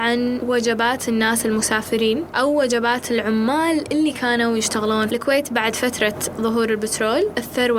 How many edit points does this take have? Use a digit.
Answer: 1